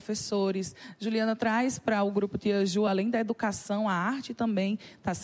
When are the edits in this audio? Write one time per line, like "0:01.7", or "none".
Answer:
none